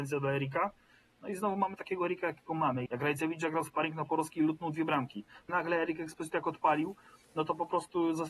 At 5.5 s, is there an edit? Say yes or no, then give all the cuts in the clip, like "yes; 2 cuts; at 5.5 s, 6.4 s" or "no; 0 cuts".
yes; 2 cuts; at 2.9 s, 5.5 s